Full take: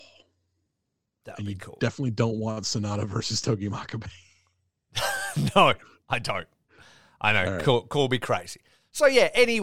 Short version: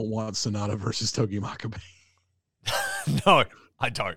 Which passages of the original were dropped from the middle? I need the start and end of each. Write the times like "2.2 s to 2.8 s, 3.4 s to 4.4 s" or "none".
none